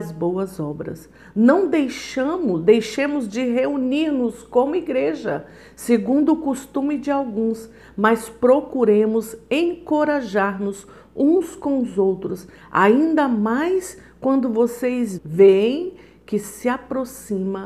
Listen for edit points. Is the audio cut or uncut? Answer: cut